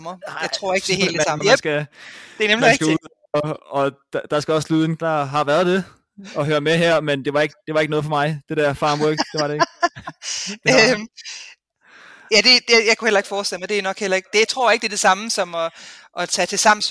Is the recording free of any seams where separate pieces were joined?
no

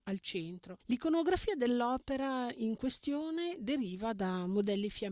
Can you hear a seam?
no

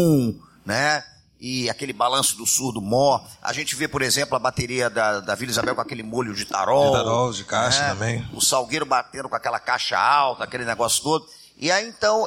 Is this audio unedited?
yes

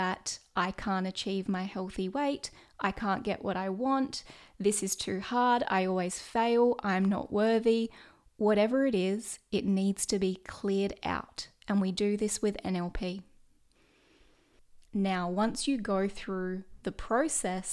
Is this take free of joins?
no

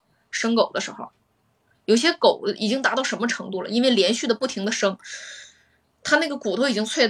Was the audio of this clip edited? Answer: no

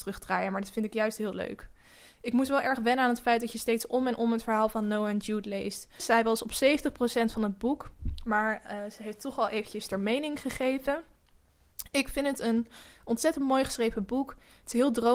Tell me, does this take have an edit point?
yes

